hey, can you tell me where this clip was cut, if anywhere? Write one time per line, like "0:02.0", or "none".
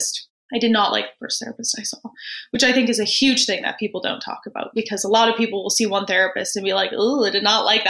none